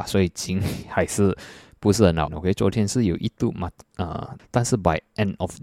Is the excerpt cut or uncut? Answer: cut